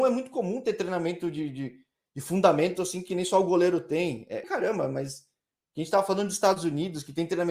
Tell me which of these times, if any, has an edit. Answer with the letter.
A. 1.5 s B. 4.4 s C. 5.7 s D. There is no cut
B